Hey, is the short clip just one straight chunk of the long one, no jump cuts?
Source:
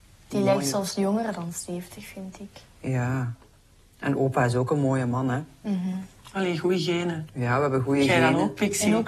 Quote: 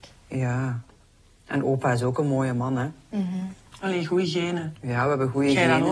yes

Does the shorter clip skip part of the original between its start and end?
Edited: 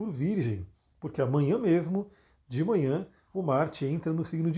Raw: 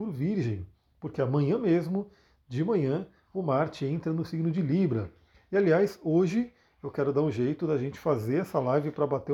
no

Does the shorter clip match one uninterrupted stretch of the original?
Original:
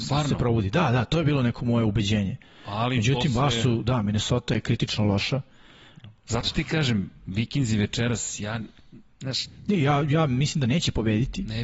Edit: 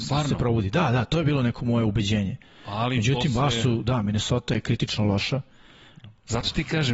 yes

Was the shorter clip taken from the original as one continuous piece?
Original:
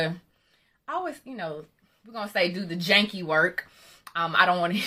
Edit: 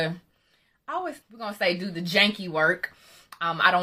no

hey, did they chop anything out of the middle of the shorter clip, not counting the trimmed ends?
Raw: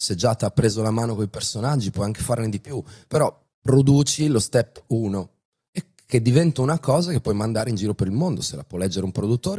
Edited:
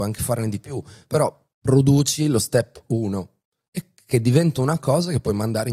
no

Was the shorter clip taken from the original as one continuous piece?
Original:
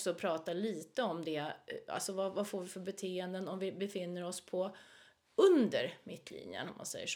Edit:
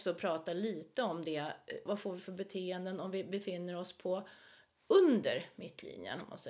no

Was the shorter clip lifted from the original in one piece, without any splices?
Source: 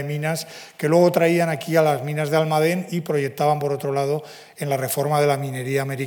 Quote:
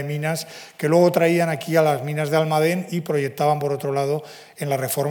yes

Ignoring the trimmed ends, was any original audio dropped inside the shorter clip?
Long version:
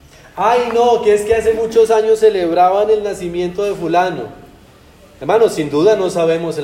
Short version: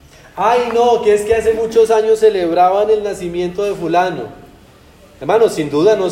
no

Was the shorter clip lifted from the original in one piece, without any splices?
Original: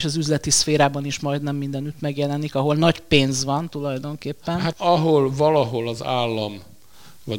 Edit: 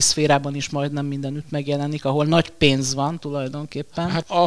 yes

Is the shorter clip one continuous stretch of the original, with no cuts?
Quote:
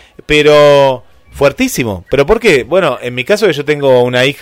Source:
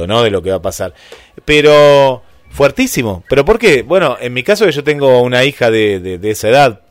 yes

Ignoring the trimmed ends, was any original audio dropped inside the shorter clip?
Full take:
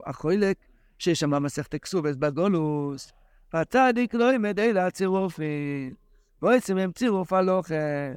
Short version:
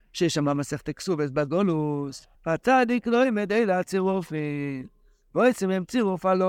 yes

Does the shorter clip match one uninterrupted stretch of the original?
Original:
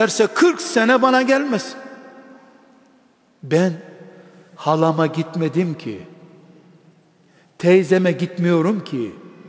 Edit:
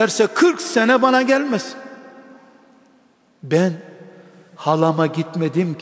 yes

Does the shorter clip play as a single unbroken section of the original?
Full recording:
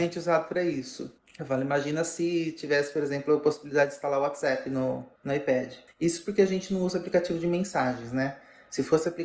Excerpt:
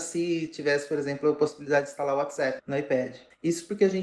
no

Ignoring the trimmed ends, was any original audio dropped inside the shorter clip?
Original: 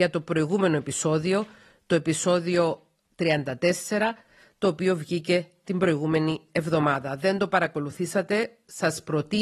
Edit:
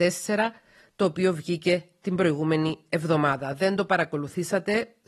no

